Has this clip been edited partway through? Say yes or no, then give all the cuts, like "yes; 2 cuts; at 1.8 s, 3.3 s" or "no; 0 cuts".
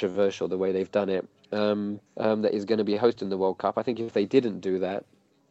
yes; 1 cut; at 2.1 s